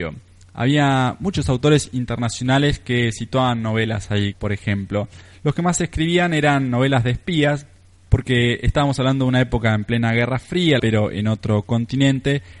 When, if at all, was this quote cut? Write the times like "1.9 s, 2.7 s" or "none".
4.3 s, 10.8 s